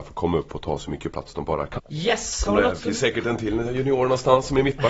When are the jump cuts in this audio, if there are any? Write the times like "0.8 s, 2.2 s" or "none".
1.8 s